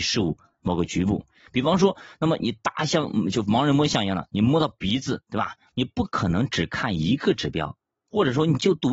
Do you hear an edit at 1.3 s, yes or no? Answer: no